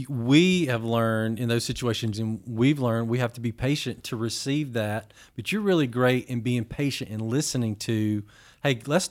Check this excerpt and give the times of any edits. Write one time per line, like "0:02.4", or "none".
0:02.1